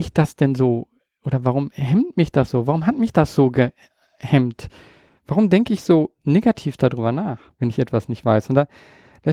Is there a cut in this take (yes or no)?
no